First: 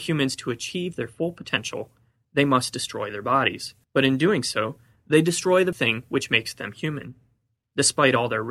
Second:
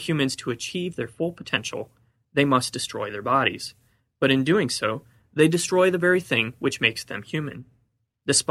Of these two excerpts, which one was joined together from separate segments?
first; 2 cuts; at 3.8 s, 5.7 s

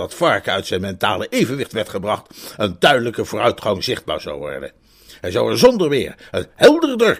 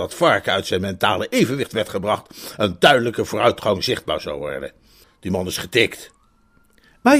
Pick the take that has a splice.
second; 1 cut; at 5.0 s

